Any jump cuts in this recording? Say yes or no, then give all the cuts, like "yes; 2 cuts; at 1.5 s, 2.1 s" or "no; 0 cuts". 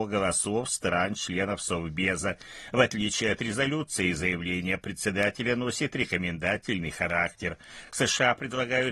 no; 0 cuts